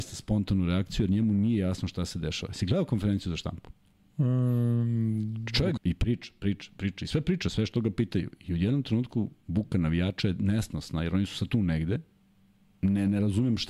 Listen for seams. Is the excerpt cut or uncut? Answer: cut